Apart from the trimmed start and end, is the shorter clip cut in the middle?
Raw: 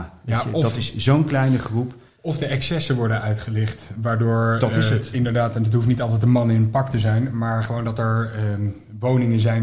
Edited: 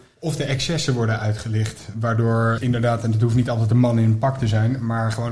yes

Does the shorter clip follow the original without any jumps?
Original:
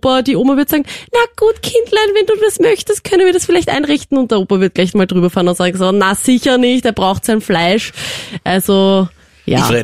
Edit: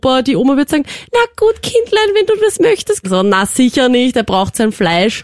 no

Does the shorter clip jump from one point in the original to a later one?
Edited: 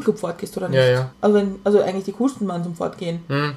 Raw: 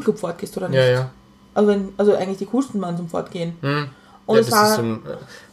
yes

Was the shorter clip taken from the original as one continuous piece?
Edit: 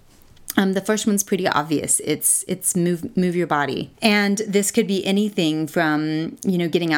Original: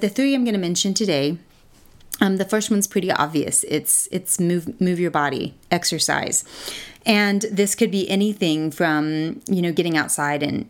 no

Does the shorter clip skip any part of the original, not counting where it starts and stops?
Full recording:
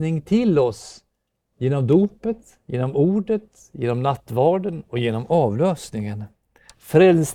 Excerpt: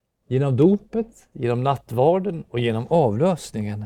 yes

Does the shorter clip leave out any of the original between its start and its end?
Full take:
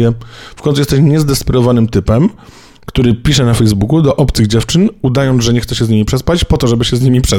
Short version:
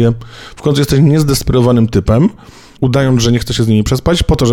yes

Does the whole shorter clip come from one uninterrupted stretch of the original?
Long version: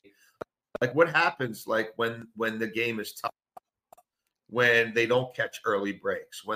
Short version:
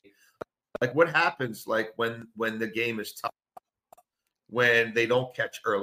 yes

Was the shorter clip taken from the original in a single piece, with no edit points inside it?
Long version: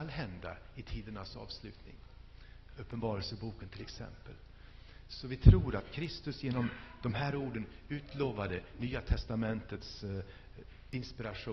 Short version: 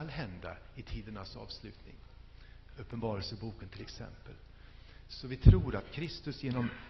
yes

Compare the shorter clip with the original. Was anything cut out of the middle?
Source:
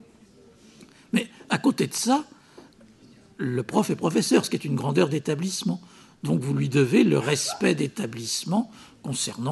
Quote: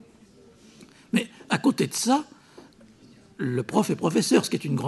no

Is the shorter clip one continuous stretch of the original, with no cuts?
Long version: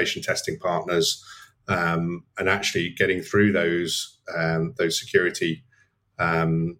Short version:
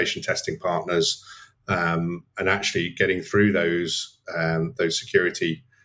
yes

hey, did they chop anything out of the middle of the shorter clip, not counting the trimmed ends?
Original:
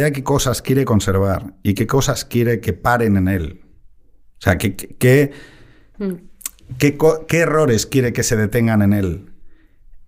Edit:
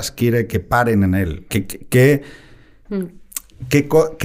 yes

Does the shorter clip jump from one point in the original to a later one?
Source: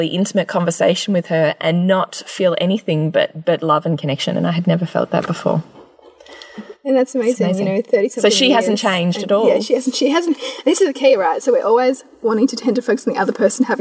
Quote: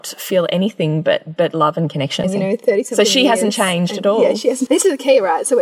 yes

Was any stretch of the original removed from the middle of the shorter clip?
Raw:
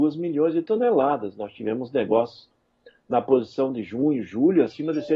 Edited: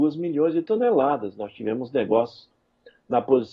no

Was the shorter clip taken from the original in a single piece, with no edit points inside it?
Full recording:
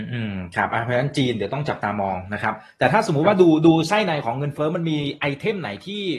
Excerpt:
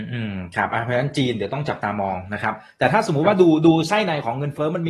yes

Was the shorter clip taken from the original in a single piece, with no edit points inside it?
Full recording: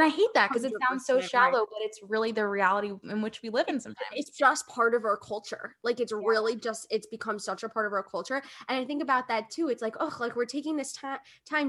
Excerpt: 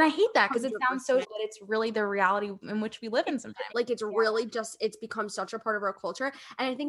no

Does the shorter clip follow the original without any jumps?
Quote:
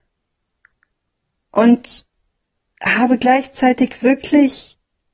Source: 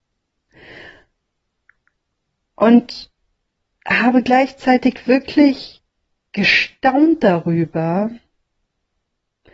yes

